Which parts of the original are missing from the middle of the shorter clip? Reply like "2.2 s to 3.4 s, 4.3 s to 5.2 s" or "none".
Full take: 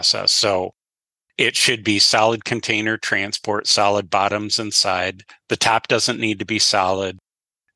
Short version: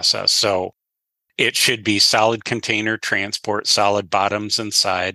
none